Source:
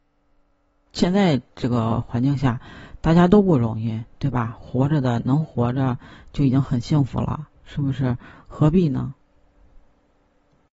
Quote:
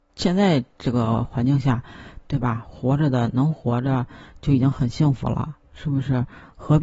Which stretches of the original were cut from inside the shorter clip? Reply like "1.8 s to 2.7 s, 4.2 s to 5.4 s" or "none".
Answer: 3.0 s to 4.1 s